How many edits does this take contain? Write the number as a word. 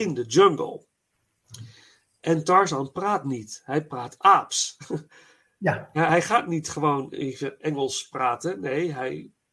zero